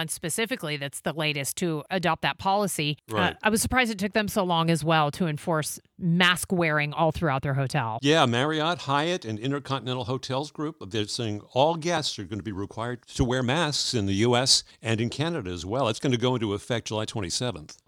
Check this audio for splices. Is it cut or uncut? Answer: uncut